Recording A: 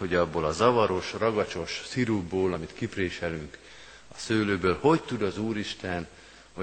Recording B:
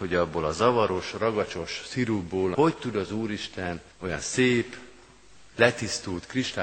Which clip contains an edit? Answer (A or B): B